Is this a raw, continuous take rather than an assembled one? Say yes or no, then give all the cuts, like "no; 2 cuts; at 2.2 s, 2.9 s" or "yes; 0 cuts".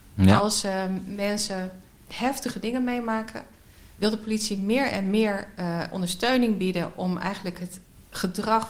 yes; 0 cuts